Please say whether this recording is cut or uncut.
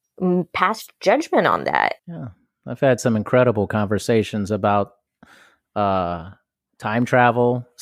cut